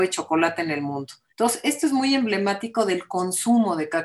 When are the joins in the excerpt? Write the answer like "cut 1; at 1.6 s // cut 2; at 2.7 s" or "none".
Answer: cut 1; at 1.3 s

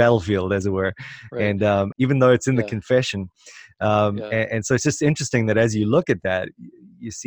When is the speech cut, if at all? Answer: cut 1; at 1.9 s

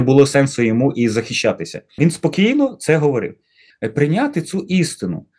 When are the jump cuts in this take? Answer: cut 1; at 2.0 s // cut 2; at 3.7 s

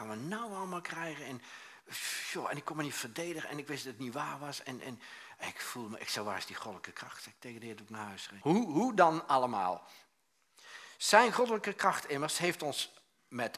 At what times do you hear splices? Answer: cut 1; at 8.4 s

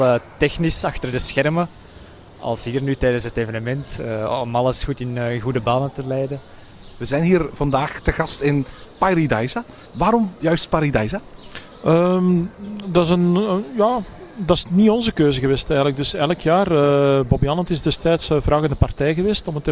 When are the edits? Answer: none

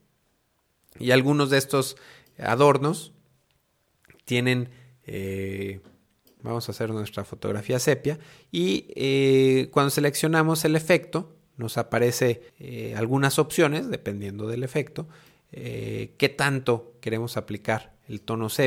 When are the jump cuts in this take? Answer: cut 1; at 6.4 s // cut 2; at 12.5 s

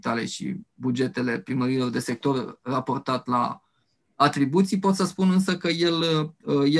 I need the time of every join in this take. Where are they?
none

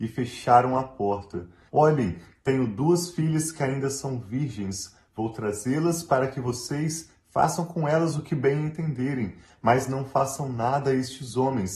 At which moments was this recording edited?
cut 1; at 1.7 s

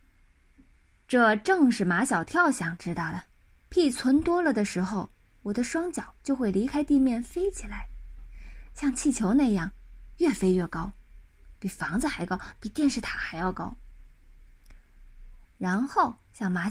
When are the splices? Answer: cut 1; at 3.7 s // cut 2; at 11.5 s // cut 3; at 15.4 s

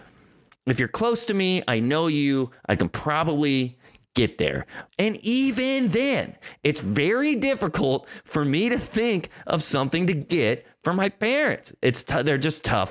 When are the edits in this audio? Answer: cut 1; at 4.9 s

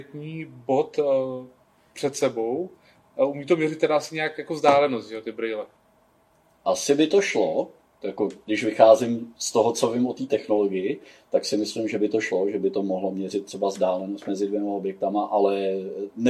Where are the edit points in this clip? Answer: none

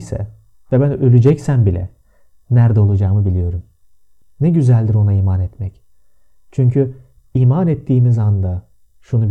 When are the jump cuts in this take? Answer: cut 1; at 4.2 s

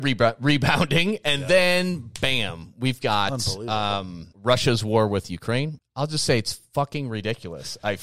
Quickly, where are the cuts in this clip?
cut 1; at 4.3 s // cut 2; at 5.8 s

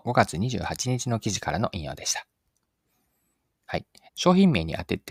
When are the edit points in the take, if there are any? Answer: cut 1; at 4.1 s

